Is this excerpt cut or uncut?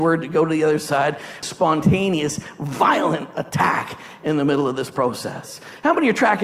cut